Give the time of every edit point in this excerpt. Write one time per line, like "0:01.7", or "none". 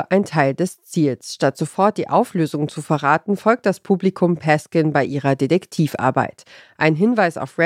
none